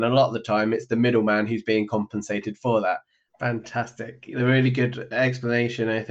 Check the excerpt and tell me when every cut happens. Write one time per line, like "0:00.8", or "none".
0:03.3